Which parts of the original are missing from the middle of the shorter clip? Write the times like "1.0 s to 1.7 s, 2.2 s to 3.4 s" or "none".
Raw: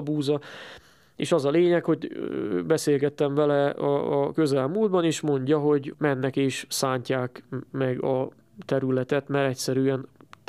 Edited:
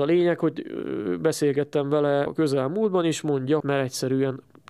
3.7 s to 4.3 s, 5.6 s to 9.3 s